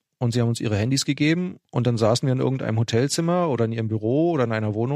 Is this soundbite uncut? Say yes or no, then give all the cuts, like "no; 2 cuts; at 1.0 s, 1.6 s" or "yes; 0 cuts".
yes; 0 cuts